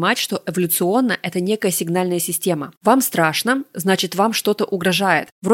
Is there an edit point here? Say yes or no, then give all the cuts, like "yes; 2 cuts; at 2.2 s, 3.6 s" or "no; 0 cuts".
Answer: no; 0 cuts